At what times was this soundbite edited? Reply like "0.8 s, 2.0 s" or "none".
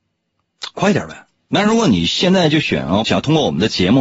1.4 s, 3.0 s